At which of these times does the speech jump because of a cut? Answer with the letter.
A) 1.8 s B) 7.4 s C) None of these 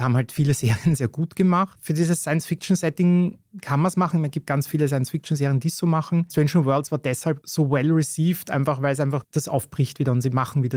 B